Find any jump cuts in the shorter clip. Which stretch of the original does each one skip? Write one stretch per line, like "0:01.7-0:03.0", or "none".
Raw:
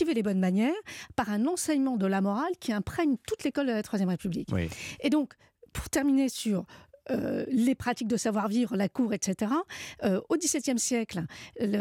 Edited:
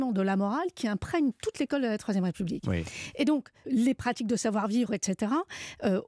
0:05.5-0:07.5
0:08.7-0:09.1